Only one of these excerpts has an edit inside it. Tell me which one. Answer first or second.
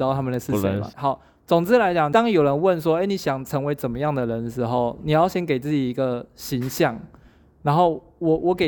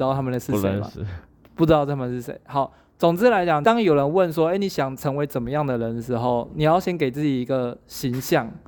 first